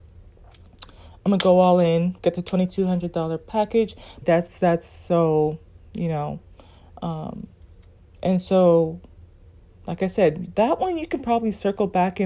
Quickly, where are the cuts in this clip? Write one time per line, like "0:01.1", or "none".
0:04.2